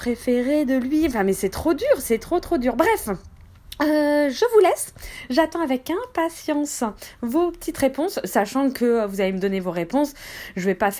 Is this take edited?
no; 0 cuts

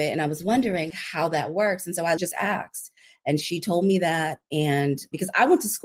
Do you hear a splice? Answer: yes; 2 cuts; at 0.9 s, 2.2 s

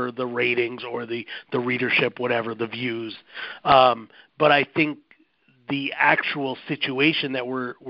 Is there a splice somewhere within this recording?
no; 0 cuts

